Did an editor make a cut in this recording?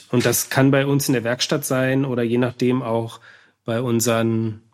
no; 0 cuts

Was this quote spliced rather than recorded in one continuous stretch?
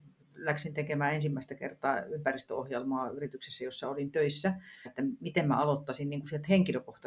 yes; 1 cut; at 4.8 s

